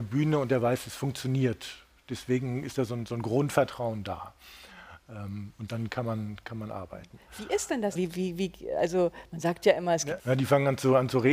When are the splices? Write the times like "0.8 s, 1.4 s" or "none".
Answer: 8.0 s, 10.2 s